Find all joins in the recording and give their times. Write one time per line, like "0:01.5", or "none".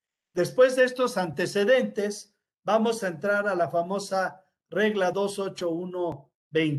none